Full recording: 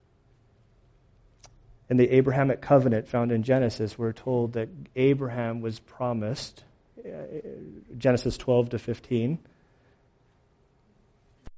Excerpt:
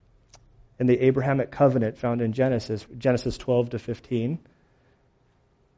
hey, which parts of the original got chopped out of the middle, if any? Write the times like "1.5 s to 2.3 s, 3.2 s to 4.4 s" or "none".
4.0 s to 7.9 s